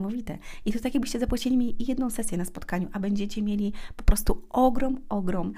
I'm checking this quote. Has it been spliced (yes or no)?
no